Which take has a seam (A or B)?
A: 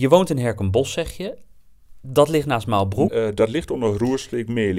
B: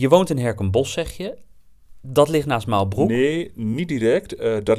A